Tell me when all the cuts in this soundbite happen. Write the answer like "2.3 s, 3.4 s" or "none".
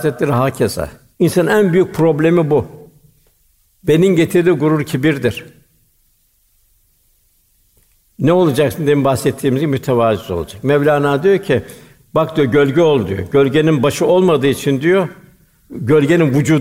1.1 s, 3.6 s

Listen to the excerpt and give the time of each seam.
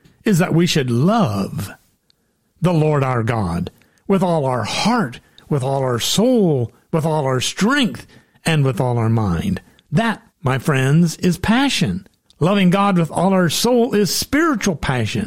10.3 s, 12.2 s

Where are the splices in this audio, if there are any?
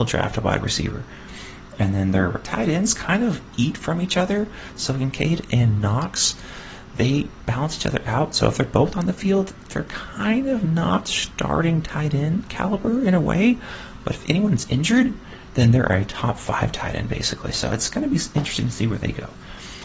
none

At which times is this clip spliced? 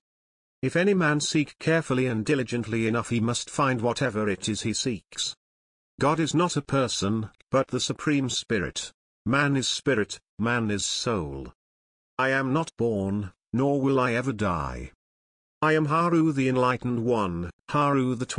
9.2 s

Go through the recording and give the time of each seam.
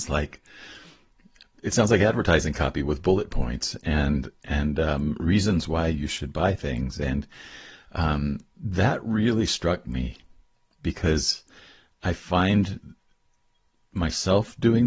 none

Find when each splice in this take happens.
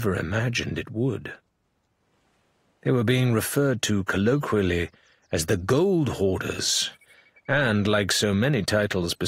none

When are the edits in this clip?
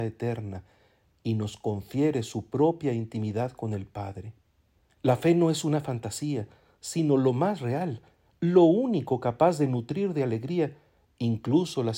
4.9 s

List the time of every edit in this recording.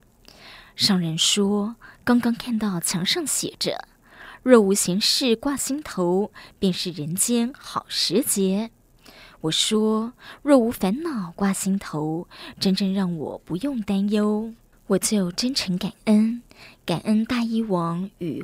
none

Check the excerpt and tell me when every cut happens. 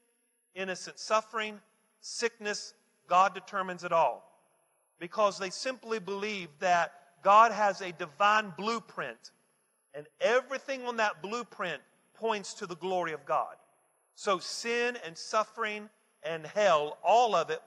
none

